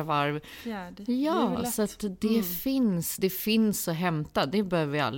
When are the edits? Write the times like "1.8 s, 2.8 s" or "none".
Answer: none